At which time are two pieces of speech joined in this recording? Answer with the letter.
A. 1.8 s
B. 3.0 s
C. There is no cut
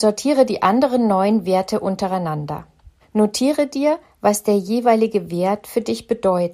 B